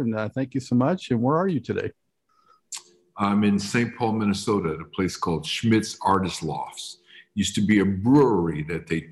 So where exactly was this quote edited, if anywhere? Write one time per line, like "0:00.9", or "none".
none